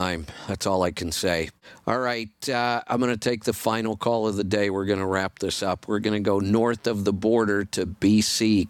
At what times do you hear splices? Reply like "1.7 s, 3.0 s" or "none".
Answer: none